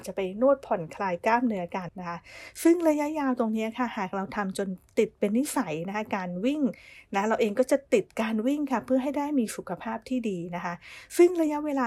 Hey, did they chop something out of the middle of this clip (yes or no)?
yes